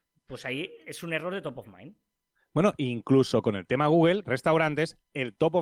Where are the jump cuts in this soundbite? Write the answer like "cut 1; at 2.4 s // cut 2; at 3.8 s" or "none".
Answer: cut 1; at 4.2 s